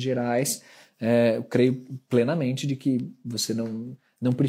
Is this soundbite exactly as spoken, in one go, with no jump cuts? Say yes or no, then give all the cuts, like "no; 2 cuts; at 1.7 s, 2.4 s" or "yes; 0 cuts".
yes; 0 cuts